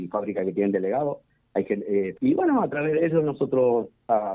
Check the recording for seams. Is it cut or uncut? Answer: cut